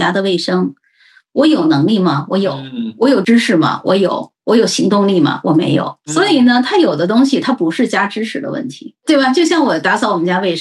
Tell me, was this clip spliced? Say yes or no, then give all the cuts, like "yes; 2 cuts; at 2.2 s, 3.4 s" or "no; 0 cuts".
no; 0 cuts